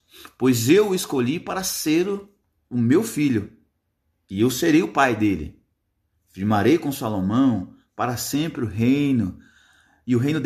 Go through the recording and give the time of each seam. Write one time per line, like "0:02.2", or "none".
none